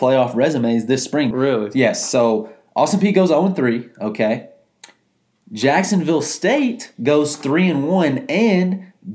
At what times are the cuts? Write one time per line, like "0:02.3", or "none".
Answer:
0:01.3

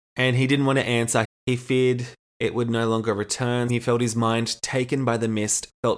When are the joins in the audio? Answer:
0:01.2
0:03.7

